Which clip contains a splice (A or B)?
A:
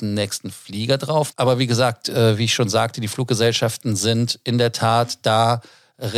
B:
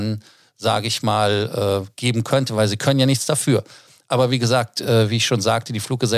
A